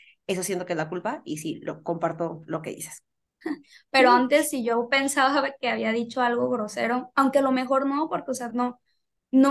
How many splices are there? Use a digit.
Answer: 2